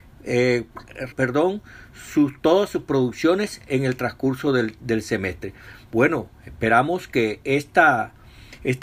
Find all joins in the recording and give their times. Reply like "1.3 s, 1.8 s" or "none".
1.1 s